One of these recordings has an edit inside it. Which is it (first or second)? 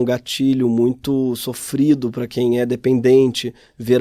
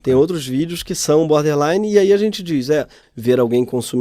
second